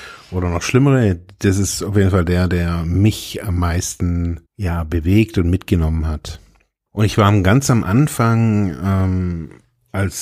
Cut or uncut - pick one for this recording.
cut